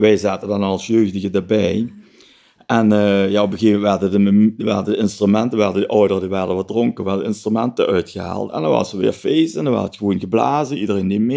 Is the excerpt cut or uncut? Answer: uncut